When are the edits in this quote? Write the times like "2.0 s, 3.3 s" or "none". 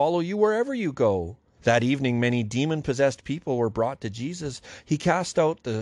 1.6 s